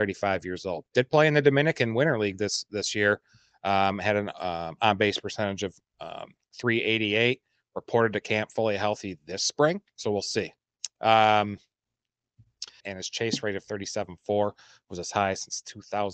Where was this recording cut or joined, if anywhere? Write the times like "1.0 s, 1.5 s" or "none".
9.9 s, 12.8 s